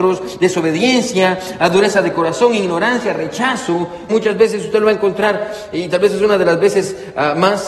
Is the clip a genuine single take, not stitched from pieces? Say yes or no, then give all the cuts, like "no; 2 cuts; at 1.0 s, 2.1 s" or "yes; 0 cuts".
no; 1 cut; at 4.1 s